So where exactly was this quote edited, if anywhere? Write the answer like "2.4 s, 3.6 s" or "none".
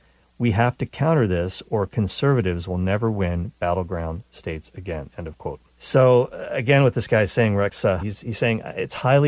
5.7 s, 8.0 s